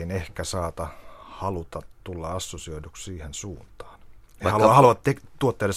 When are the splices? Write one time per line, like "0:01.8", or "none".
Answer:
none